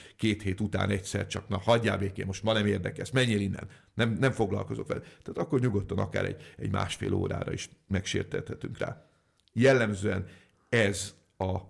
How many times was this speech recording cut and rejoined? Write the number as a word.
zero